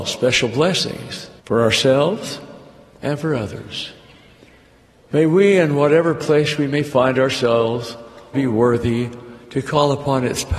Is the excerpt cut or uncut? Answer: cut